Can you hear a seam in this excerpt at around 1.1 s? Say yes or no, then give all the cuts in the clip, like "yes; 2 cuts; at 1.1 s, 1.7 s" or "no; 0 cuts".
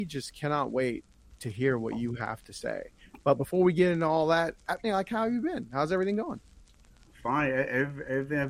no; 1 cut; at 4.8 s